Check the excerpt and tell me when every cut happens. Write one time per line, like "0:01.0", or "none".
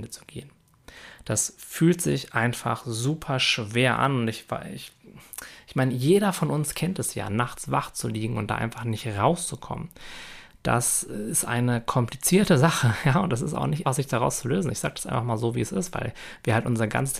0:13.8